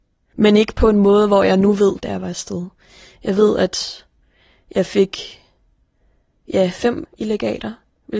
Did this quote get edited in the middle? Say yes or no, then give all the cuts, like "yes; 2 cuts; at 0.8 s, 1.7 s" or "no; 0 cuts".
yes; 2 cuts; at 2.0 s, 7.1 s